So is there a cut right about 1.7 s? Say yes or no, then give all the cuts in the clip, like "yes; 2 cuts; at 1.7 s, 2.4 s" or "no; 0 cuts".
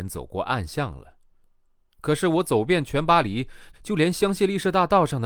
no; 1 cut; at 3.7 s